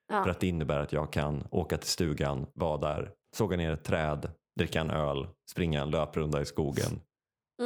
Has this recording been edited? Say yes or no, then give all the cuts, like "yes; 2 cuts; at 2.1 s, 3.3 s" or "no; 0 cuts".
yes; 1 cut; at 3.2 s